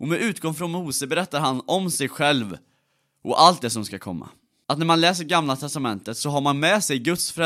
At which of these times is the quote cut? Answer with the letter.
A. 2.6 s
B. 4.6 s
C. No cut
B